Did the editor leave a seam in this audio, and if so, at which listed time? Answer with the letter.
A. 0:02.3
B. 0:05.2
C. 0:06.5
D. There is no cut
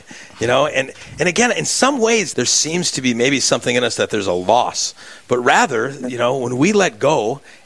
A